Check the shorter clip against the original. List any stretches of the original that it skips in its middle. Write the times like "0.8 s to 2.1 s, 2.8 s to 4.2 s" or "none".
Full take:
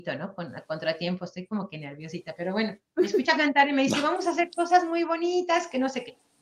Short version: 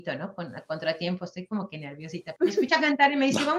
2.4 s to 2.9 s